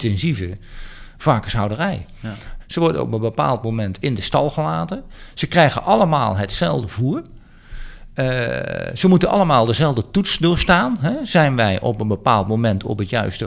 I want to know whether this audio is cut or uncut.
cut